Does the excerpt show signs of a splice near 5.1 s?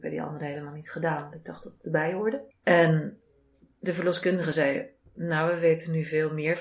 no; 1 cut; at 2.5 s

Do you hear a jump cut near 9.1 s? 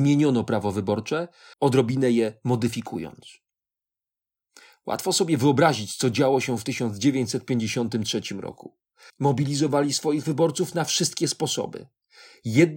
yes; 2 cuts; at 1.5 s, 9.1 s

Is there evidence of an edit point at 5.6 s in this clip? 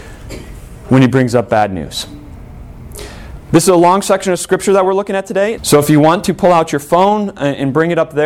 yes; 1 cut; at 5.6 s

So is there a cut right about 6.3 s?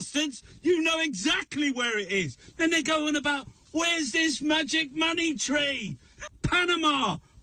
yes; 1 cut; at 6.3 s

